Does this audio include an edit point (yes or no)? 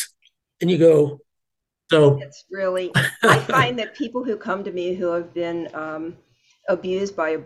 yes